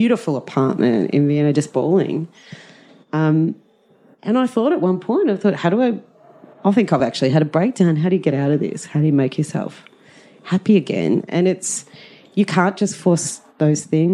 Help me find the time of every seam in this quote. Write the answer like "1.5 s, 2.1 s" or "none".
none